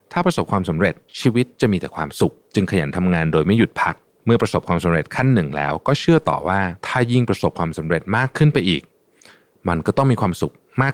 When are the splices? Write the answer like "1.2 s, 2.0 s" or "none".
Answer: none